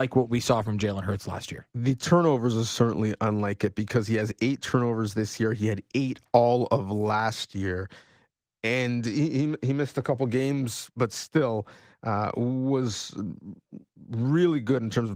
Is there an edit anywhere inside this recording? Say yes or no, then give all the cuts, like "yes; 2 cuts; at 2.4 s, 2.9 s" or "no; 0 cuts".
no; 0 cuts